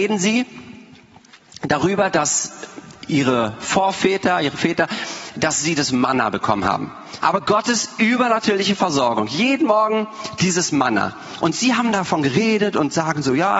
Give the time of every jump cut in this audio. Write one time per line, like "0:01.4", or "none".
0:07.2